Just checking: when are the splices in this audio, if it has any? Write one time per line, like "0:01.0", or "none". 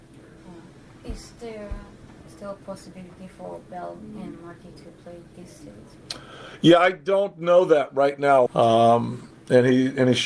0:08.5